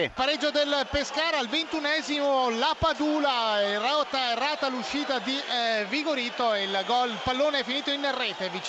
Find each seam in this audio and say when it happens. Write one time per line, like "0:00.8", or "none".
none